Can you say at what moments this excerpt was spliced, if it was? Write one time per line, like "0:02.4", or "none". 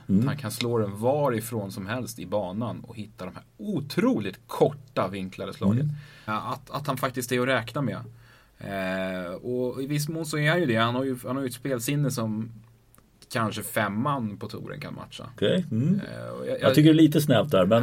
0:06.3
0:15.4